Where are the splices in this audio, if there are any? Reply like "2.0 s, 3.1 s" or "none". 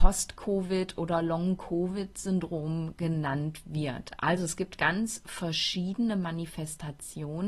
4.2 s